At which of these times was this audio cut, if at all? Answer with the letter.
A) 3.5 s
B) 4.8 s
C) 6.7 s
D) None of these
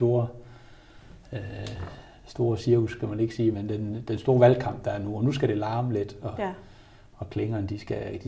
A